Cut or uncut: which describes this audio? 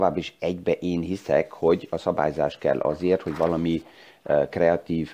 uncut